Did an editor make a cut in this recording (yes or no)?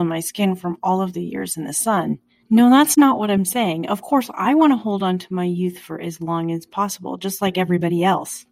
no